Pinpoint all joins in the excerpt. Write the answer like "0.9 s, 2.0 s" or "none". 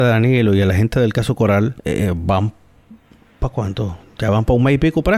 1.8 s

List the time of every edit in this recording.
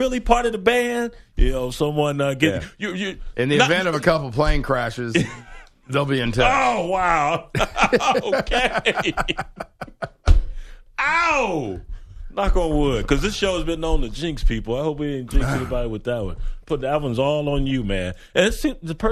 1.3 s

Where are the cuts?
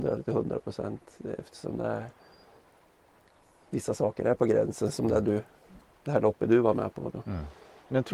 none

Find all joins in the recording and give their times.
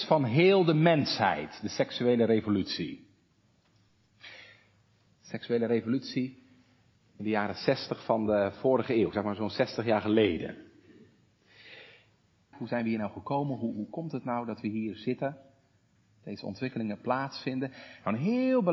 5.1 s, 12.5 s

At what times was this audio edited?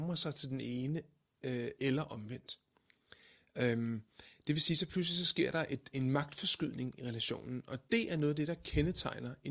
none

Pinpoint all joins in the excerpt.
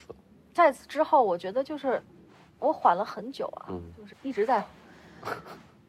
4.1 s

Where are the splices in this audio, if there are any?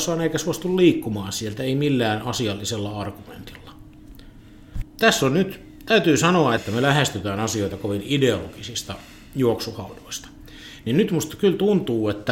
4.8 s, 6.6 s

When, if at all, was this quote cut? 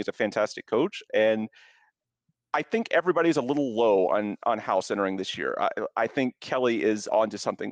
none

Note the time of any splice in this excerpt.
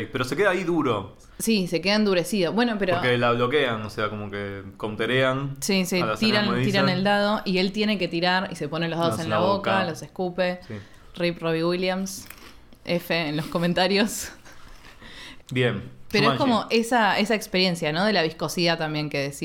none

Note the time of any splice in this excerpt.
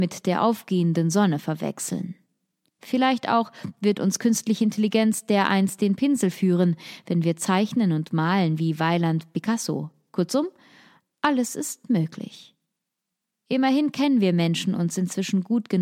none

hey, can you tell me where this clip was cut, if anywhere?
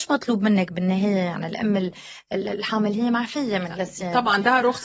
none

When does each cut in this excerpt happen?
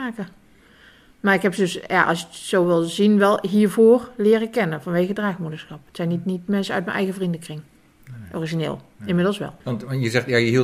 9.6 s

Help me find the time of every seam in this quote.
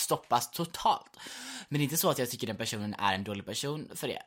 1.7 s

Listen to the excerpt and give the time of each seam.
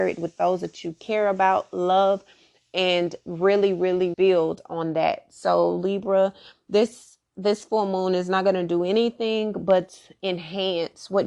4.1 s

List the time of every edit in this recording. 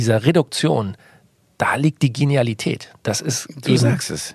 none

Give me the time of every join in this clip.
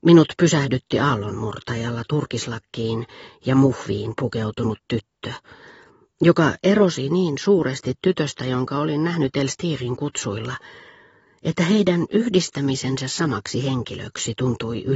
none

